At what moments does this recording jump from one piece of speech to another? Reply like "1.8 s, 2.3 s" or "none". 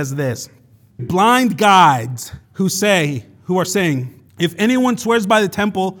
1.0 s, 2.4 s, 4.3 s